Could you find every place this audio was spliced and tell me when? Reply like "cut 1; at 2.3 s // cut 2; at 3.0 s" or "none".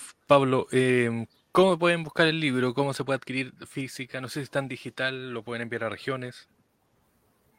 none